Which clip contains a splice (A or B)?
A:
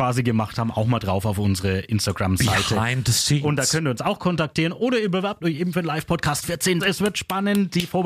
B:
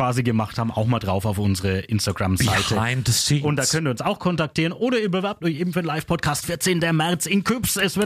A